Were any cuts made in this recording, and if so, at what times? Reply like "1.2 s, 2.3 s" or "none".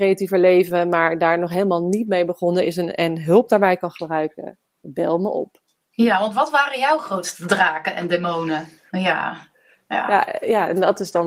8.9 s